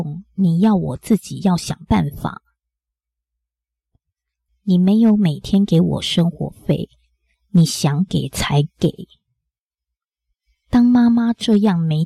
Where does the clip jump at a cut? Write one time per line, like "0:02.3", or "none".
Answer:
0:04.5